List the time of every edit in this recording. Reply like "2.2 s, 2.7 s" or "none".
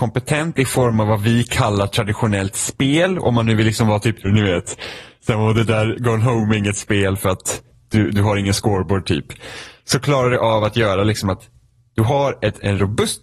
4.2 s